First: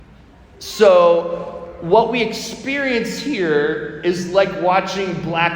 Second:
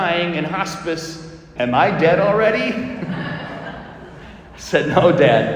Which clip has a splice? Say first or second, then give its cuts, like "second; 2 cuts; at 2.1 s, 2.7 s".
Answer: second; 1 cut; at 1.6 s